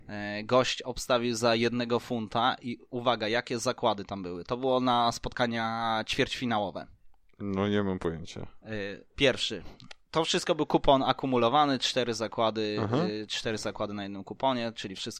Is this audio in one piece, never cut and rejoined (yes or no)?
no